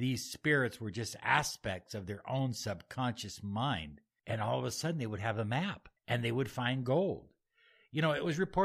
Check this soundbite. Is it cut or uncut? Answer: cut